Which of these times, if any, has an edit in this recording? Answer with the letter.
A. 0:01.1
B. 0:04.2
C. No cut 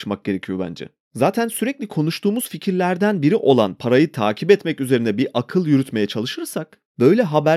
C